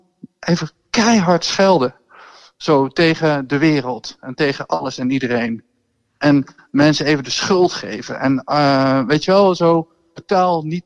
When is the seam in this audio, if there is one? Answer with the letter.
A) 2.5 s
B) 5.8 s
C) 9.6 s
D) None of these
D